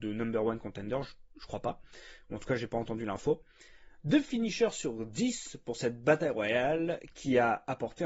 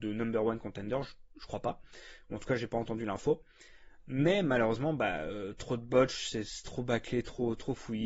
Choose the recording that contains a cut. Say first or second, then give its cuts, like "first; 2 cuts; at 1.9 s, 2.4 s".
second; 1 cut; at 4.0 s